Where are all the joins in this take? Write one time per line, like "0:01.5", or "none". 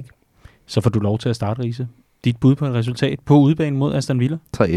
none